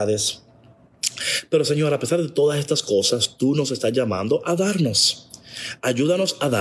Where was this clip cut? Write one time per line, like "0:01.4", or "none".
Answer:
none